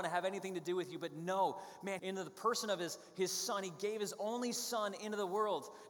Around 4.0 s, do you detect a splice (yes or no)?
no